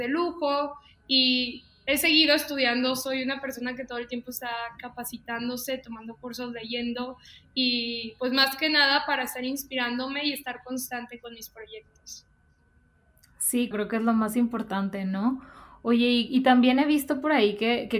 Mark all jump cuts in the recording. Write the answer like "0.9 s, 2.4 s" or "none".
13.7 s